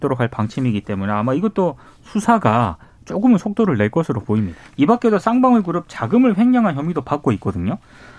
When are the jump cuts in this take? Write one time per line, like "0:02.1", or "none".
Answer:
0:04.6